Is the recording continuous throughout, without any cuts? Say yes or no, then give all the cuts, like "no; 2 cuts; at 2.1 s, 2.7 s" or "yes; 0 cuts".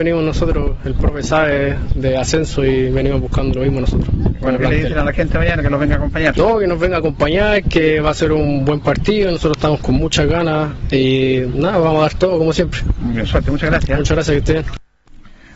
yes; 0 cuts